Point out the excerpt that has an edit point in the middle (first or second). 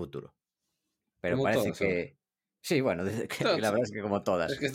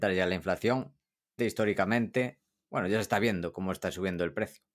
second